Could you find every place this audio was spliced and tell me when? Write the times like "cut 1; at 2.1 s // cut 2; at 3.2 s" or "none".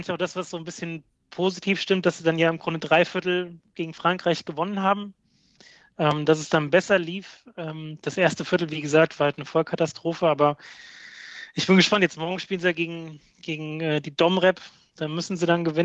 none